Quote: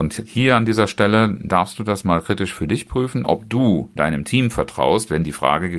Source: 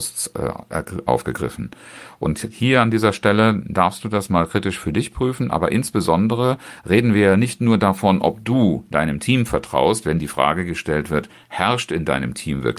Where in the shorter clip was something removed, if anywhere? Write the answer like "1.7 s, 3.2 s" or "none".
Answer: 3.2 s